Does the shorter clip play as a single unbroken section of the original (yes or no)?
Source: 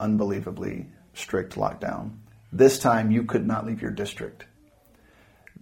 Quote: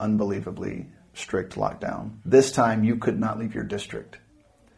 no